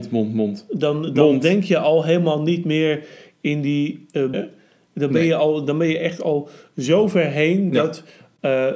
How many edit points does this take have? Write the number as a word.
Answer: one